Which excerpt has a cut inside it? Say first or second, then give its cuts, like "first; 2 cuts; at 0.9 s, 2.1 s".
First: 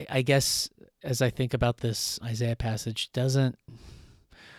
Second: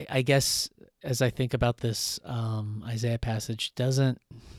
first; 1 cut; at 2.2 s